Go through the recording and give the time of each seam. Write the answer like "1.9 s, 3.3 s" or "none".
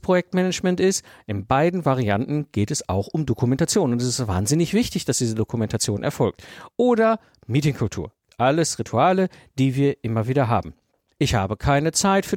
11.1 s